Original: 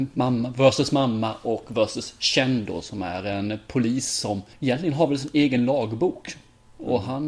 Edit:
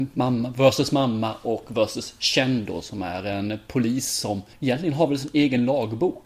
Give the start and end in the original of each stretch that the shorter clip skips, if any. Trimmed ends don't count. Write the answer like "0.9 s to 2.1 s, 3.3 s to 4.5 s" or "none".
none